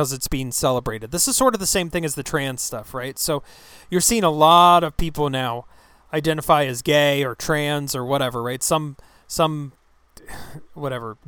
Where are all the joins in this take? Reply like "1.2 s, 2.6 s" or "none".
none